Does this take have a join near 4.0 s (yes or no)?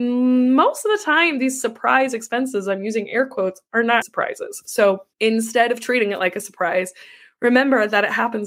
yes